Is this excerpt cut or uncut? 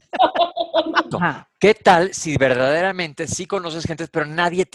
cut